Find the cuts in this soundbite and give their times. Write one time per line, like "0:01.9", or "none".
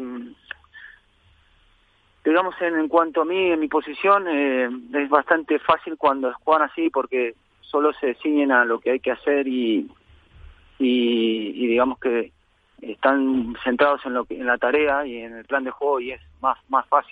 none